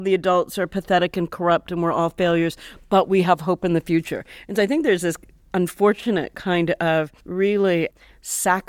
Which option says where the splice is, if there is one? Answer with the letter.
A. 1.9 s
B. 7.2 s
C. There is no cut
B